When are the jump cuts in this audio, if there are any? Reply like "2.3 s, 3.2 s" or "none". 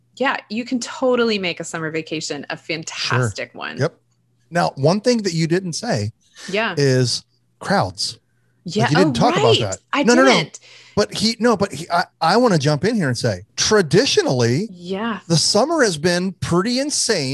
13.5 s

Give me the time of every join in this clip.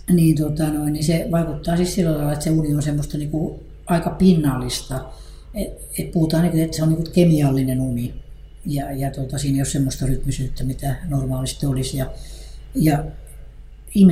none

